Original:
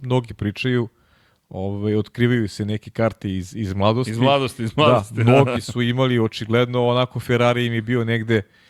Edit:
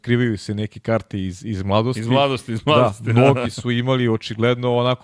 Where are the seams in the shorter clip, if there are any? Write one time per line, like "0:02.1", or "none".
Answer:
none